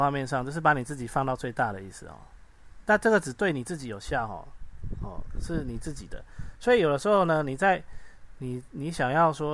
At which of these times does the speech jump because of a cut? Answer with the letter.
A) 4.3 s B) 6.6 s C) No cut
C